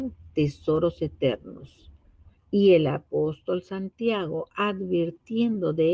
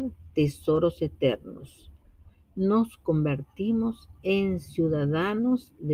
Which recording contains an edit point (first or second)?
first